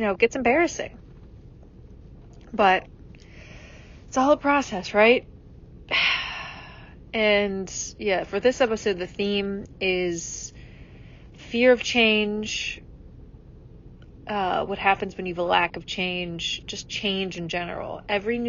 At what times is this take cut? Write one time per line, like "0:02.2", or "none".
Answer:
none